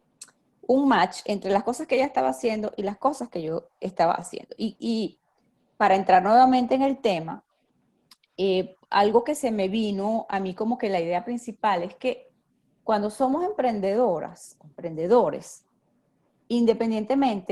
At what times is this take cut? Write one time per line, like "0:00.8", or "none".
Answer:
none